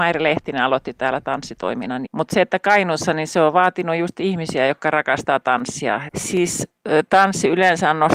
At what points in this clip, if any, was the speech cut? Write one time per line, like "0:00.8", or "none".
0:02.1
0:06.1